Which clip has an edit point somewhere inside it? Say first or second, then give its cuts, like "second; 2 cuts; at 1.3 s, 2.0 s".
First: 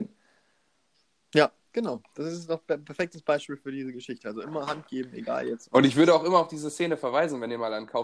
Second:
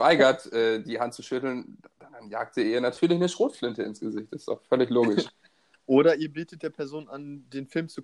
first; 1 cut; at 1.6 s